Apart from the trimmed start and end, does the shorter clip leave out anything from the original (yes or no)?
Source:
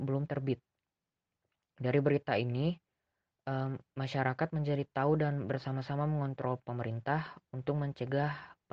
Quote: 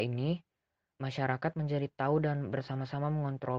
yes